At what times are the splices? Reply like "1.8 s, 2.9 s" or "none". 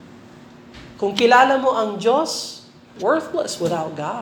3.0 s